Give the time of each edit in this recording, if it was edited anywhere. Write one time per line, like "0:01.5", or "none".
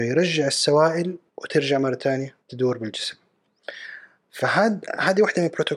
0:01.3
0:02.4